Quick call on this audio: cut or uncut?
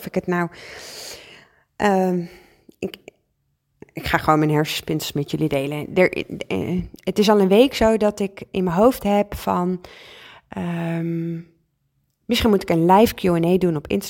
uncut